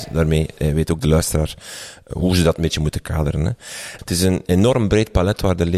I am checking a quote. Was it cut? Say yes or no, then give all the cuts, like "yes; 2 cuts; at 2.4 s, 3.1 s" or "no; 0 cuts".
yes; 1 cut; at 4.0 s